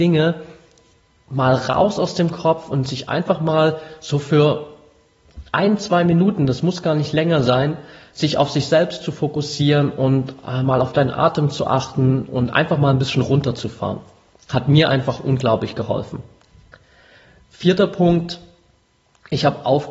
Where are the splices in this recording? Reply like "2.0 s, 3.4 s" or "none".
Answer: none